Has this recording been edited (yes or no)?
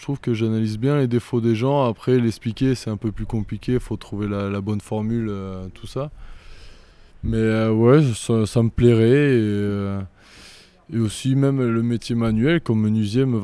no